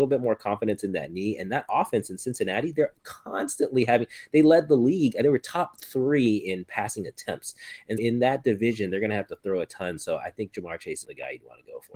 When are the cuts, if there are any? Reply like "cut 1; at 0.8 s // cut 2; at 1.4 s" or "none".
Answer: cut 1; at 8.0 s // cut 2; at 11.0 s